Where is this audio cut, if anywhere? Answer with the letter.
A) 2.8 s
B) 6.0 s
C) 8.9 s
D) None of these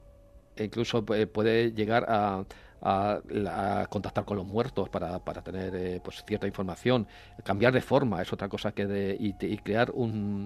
D